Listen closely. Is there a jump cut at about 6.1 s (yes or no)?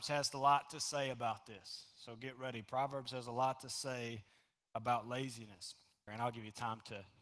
yes